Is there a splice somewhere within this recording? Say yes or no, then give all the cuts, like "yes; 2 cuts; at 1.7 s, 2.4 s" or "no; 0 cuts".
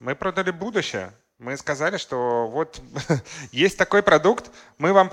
no; 0 cuts